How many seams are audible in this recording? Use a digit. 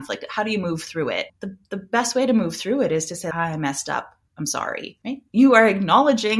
1